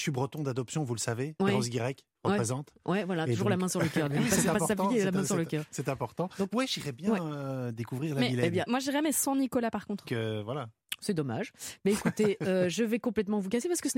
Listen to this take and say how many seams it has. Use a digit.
2